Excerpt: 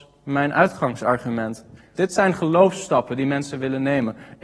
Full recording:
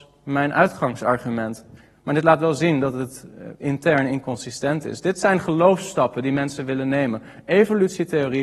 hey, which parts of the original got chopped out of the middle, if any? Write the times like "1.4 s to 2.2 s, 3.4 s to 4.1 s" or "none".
2.0 s to 5.0 s

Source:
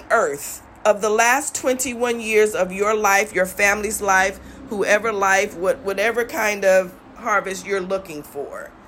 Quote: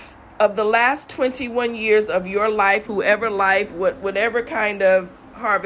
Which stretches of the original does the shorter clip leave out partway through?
3.3 s to 4.7 s

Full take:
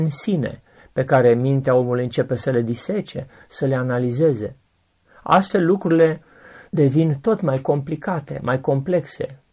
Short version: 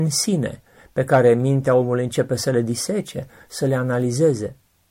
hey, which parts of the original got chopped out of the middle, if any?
none

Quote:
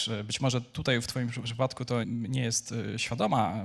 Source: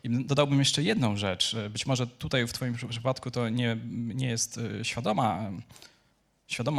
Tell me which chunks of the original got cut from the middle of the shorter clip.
3.5 s to 3.9 s

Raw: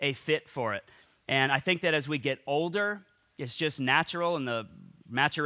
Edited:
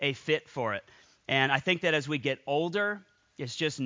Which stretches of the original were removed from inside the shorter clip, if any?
none

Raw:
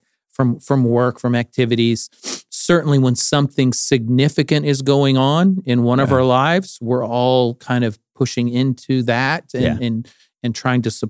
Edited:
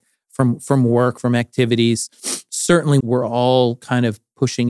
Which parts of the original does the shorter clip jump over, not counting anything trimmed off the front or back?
3.0 s to 6.8 s

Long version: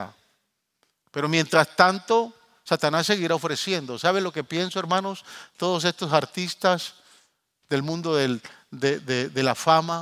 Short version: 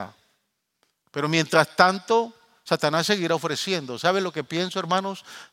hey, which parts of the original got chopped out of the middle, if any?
none

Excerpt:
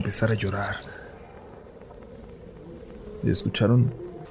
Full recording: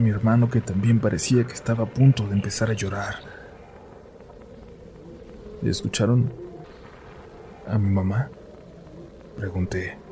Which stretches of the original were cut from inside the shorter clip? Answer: none

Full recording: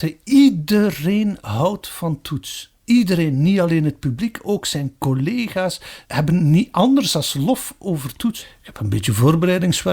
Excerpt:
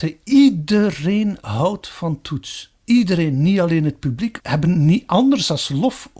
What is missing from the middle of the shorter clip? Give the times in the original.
4.4 s to 6.0 s

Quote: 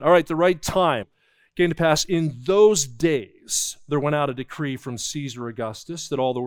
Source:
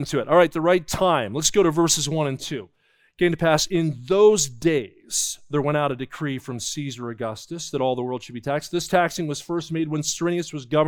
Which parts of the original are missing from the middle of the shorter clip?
1.3 s to 2.7 s

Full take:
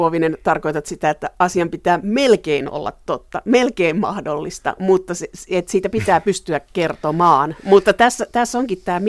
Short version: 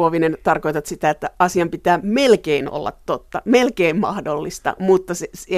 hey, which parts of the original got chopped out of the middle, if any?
none

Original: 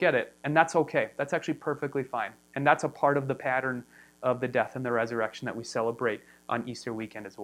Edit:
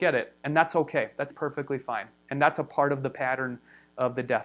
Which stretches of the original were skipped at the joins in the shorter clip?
1.3 s to 1.6 s

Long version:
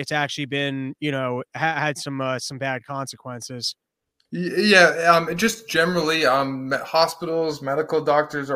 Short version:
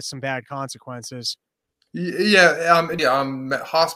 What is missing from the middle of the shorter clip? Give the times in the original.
5.4 s to 6.2 s

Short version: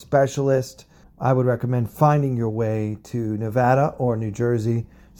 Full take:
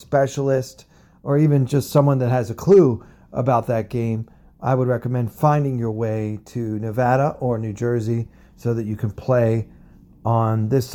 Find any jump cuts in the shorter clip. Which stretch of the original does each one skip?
1.0 s to 4.5 s

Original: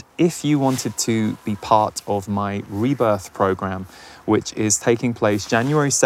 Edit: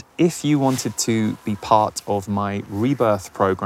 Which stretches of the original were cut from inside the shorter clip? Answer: none

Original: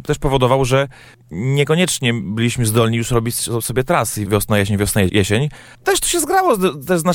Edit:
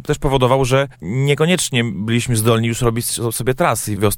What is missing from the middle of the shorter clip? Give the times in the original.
0.9 s to 1.2 s

